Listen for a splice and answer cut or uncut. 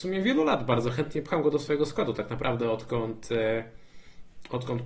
uncut